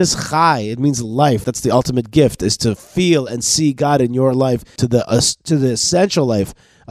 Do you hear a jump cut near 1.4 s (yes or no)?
yes